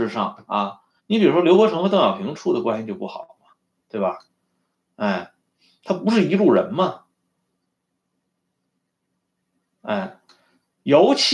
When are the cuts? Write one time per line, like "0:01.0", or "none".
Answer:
0:01.0